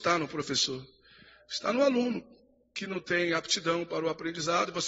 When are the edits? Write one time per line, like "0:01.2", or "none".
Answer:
none